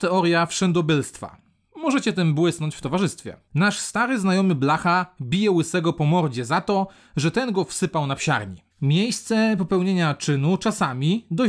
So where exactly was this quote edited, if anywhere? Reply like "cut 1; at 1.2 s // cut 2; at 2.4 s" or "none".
cut 1; at 3.5 s // cut 2; at 8.7 s